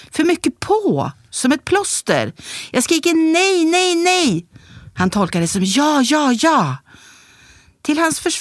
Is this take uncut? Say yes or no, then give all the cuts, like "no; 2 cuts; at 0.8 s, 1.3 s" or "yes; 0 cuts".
yes; 0 cuts